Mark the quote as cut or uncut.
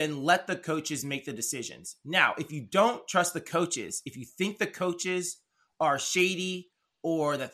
uncut